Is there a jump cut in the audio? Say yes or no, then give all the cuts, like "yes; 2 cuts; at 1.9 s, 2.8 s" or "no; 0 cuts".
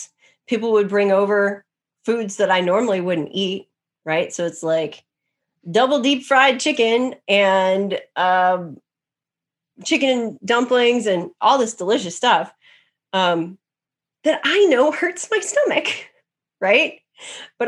no; 0 cuts